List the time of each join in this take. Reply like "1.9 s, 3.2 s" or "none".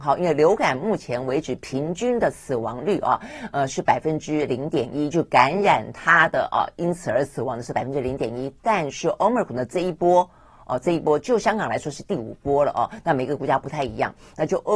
none